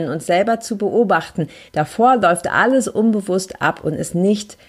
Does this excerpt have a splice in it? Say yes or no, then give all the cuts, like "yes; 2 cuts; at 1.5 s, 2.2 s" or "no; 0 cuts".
yes; 1 cut; at 1.7 s